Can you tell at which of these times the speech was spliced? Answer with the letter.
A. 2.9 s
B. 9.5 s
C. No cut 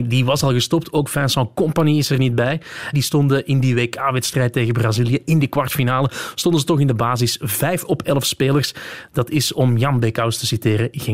A